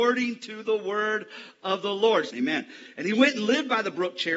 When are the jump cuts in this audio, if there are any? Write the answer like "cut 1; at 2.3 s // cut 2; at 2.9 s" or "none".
cut 1; at 2.3 s